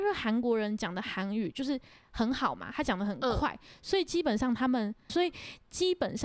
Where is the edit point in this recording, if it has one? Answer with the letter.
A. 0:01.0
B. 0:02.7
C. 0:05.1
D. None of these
C